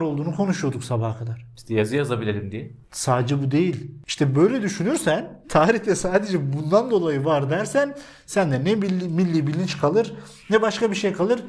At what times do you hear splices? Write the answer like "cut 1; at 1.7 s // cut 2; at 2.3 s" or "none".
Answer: none